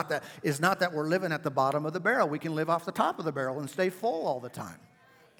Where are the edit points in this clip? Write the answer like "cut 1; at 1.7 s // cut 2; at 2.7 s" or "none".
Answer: none